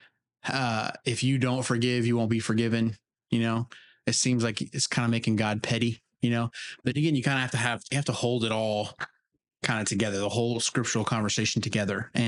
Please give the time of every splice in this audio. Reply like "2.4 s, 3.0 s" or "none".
none